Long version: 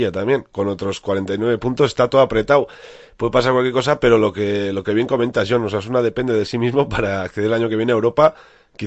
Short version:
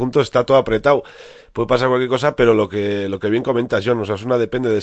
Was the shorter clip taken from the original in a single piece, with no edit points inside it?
yes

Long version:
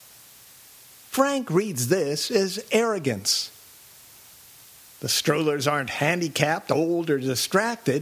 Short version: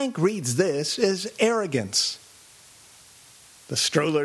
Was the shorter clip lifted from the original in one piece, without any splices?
yes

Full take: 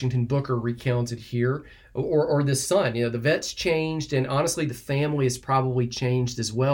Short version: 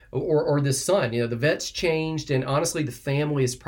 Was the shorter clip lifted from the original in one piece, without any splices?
yes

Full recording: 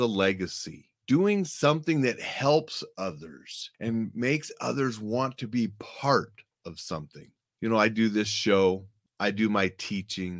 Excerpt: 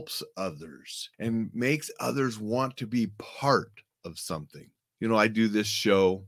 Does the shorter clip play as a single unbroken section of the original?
yes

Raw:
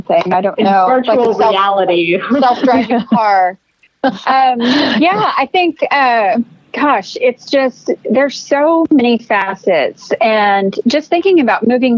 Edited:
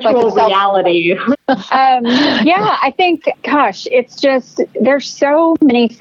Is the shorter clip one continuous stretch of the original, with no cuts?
no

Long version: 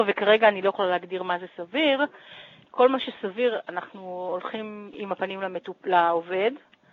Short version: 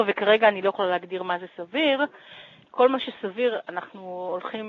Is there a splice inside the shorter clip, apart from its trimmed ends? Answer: no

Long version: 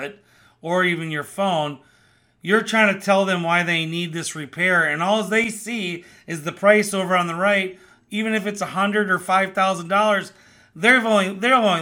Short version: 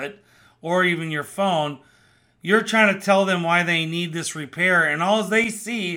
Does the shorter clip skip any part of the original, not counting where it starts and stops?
no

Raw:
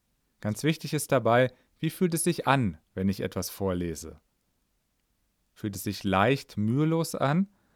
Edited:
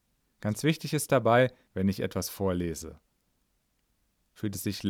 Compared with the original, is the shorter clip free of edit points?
no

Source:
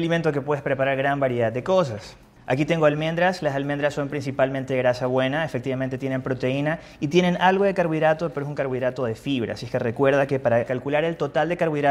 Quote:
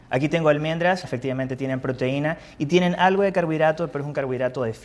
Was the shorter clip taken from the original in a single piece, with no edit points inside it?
no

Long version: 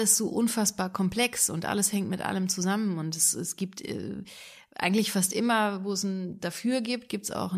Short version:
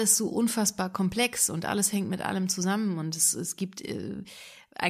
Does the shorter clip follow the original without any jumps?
yes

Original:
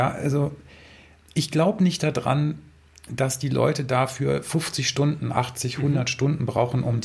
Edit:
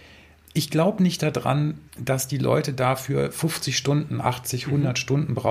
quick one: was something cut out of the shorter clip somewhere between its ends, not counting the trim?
yes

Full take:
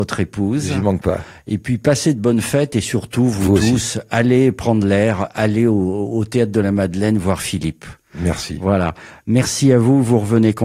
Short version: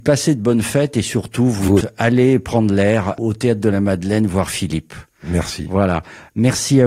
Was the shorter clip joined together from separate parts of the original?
yes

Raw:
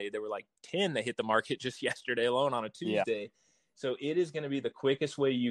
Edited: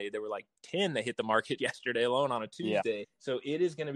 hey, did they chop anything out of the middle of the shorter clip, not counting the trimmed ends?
yes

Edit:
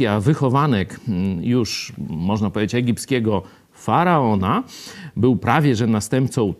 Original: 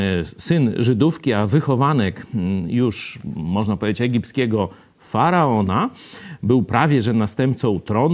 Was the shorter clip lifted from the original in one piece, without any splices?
yes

